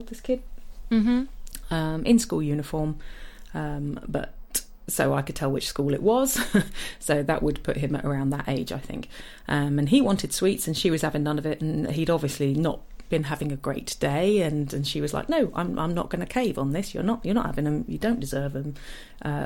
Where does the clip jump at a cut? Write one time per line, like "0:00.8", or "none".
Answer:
none